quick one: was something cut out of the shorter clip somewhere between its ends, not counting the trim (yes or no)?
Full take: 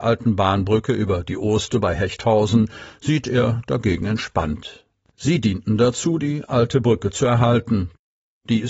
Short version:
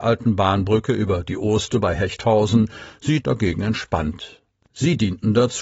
yes